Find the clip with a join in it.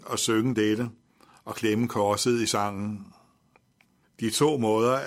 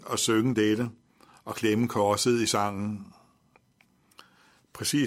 first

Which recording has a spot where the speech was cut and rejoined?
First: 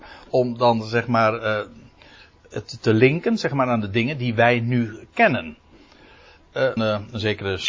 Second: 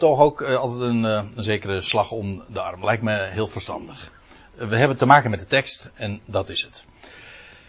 first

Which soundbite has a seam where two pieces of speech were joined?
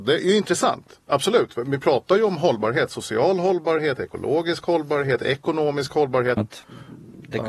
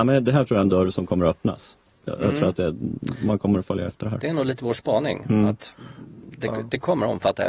first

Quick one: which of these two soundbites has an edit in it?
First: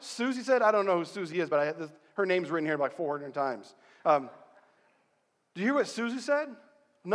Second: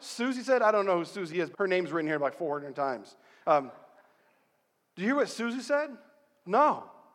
second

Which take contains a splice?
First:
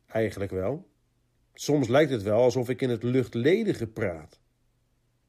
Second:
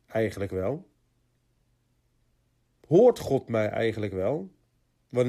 first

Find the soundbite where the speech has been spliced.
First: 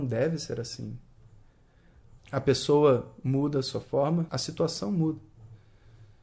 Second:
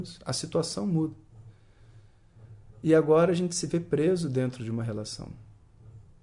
first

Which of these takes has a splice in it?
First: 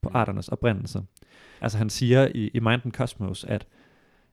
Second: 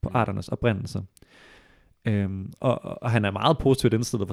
first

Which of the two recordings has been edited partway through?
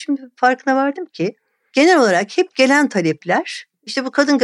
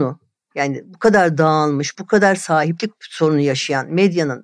second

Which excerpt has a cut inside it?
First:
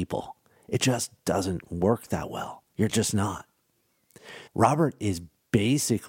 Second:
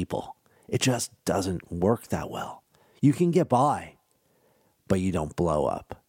first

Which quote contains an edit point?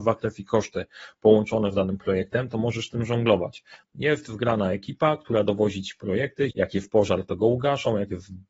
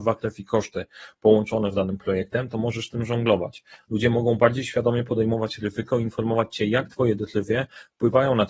first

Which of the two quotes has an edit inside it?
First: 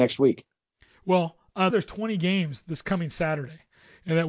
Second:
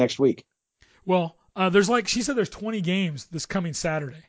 first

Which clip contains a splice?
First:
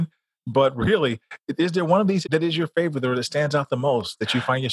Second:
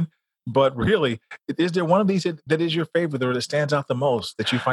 first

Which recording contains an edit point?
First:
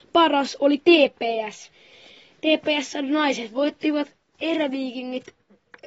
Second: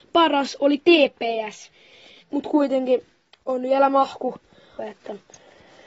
second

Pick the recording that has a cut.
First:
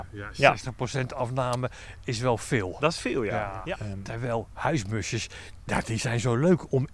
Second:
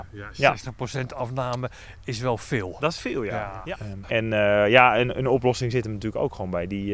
second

